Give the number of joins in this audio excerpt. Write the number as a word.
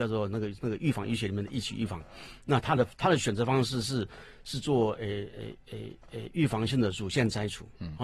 zero